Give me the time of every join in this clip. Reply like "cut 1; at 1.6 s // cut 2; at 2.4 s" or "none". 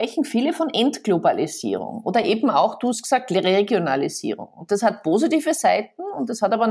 none